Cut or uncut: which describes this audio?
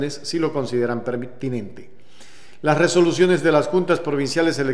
uncut